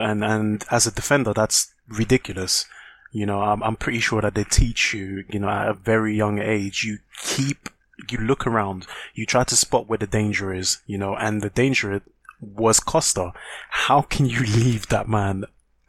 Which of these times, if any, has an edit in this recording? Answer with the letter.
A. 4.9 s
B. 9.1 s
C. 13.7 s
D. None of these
D